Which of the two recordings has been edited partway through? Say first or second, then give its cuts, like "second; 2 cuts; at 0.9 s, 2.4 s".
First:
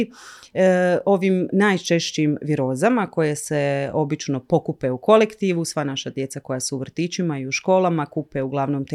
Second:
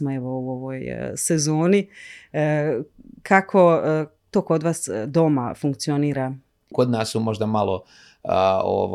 second; 1 cut; at 6.7 s